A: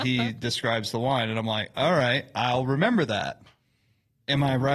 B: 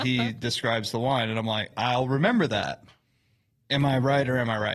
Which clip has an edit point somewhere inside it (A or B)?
B